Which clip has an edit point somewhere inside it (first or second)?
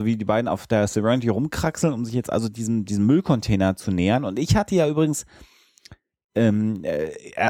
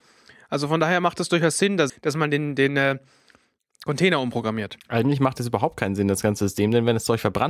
second